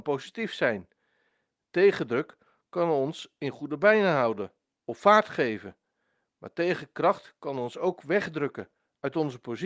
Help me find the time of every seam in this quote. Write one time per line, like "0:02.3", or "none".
none